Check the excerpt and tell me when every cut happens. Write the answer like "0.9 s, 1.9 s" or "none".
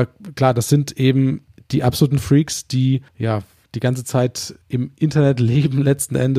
3.1 s, 4.6 s